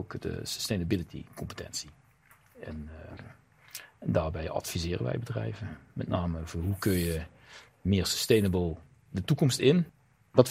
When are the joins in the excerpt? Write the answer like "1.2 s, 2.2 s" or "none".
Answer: none